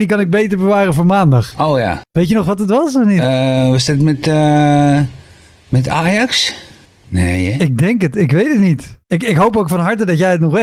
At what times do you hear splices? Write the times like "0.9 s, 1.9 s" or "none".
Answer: 9.0 s